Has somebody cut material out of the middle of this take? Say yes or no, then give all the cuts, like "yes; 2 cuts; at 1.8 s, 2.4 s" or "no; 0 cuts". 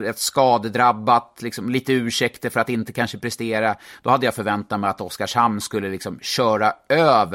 no; 0 cuts